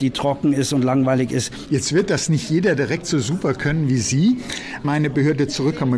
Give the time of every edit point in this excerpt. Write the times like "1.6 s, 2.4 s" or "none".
1.7 s, 4.8 s